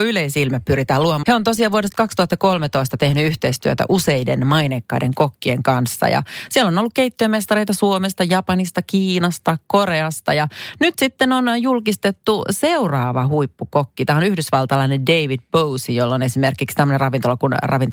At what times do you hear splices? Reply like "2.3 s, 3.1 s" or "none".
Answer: 1.2 s